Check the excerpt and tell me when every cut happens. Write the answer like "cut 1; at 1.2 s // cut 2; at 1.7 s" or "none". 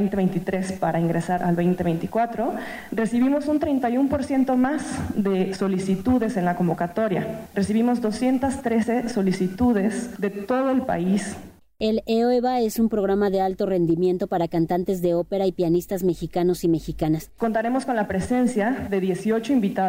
cut 1; at 1.4 s // cut 2; at 17.4 s